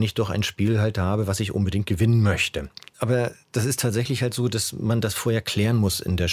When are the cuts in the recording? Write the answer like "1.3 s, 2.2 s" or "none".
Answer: none